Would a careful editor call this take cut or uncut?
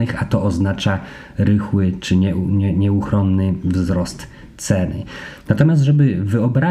uncut